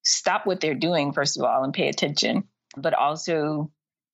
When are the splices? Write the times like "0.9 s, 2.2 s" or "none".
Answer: 2.8 s